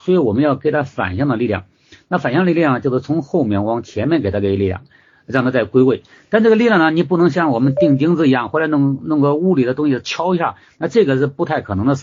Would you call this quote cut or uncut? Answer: uncut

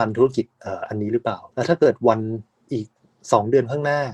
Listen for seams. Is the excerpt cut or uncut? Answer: cut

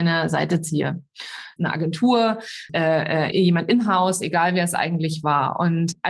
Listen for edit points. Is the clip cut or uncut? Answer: cut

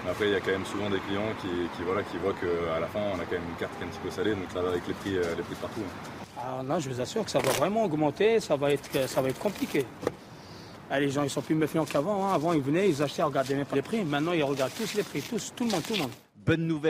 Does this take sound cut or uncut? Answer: cut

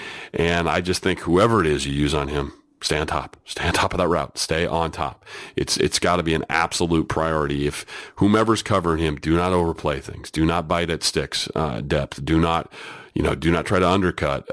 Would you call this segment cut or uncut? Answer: uncut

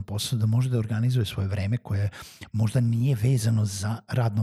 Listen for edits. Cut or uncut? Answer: uncut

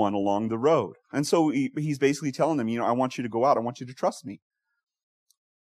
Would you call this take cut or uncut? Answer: uncut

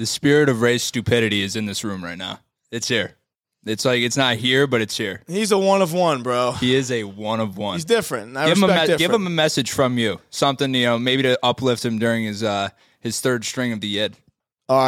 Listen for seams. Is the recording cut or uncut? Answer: uncut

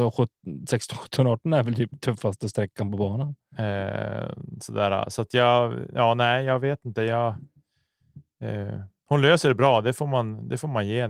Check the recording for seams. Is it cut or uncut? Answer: uncut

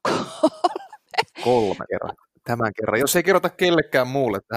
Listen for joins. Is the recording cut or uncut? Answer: cut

